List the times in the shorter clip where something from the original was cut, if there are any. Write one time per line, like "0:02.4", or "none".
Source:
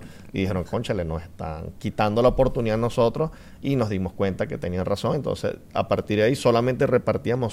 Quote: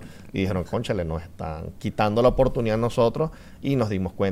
none